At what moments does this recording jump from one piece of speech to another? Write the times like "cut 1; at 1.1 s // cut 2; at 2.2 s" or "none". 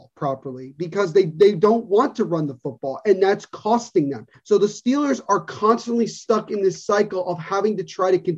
cut 1; at 4.3 s